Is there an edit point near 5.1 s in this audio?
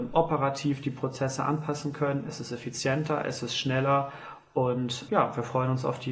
yes; 1 cut; at 5.1 s

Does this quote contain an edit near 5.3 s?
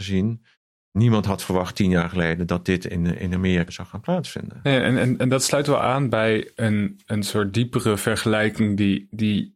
no; 1 cut; at 3.7 s

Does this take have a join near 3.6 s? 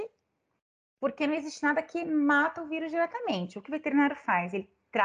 yes; 1 cut; at 3.6 s

